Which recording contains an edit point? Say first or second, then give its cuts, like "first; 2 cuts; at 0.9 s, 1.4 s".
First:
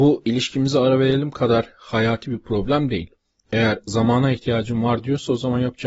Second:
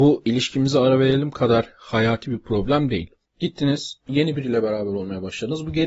second; 1 cut; at 3.2 s